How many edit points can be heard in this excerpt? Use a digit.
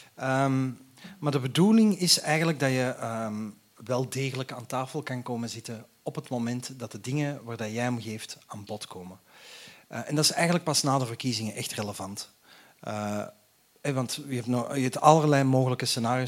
0